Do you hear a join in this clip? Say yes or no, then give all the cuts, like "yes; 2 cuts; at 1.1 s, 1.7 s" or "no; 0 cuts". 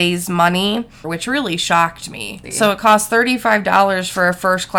yes; 2 cuts; at 1.0 s, 2.4 s